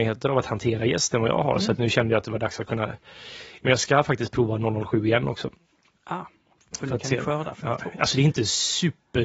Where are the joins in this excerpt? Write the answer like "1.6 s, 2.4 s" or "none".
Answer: none